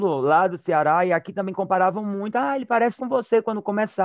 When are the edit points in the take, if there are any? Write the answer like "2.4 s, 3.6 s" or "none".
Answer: 3.0 s